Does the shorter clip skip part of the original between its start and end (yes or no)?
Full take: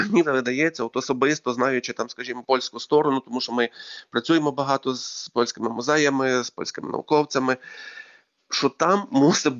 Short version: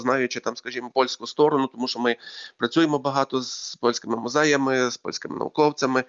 no